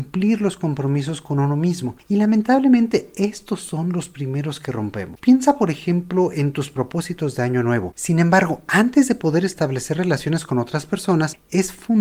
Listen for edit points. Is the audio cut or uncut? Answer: cut